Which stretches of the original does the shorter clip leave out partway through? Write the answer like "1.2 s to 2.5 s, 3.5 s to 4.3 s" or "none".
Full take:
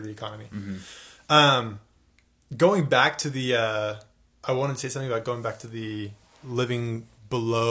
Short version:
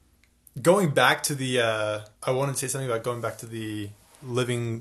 4.1 s to 4.3 s